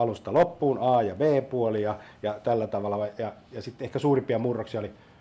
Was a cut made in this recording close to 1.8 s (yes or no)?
no